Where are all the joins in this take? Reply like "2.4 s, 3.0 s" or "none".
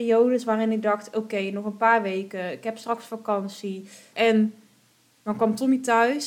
4.1 s

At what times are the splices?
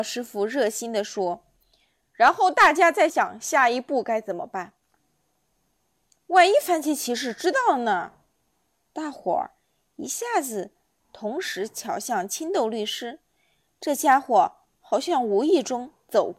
3.1 s

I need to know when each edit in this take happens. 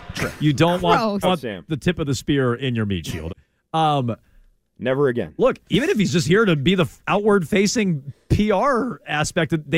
1.2 s, 3.3 s

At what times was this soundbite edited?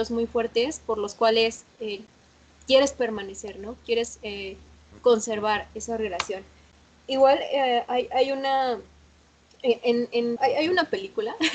10.4 s

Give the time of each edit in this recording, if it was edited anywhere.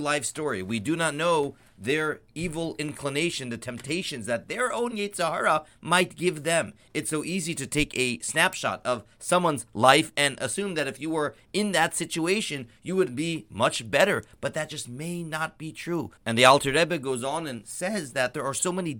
16.2 s

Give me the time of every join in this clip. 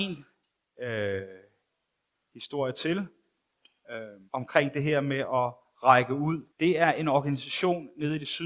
4.3 s, 6.5 s

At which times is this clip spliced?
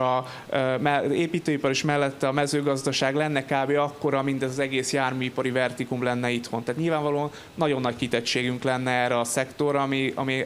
none

